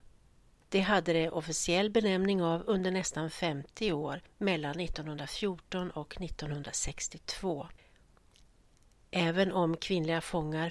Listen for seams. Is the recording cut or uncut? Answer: uncut